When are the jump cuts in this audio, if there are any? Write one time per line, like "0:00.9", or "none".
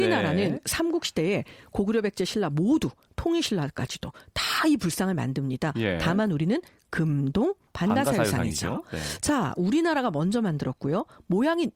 0:07.7